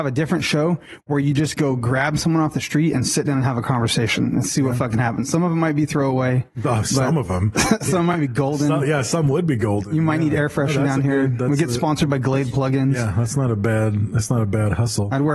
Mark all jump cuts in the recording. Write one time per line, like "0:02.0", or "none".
none

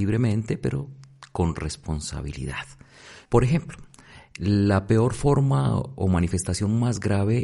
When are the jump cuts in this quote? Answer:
0:03.3

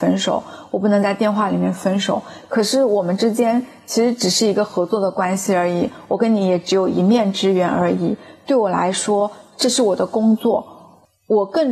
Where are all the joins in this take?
none

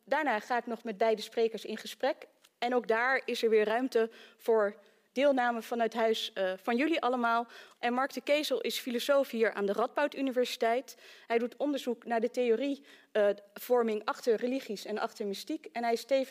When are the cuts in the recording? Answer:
0:07.8

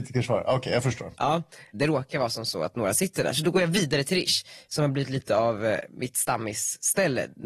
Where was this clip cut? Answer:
none

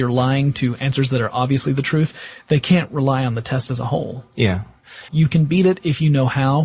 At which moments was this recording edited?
0:05.1

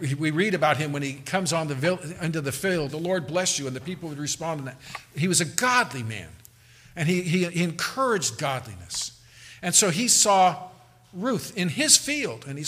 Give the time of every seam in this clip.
0:02.9

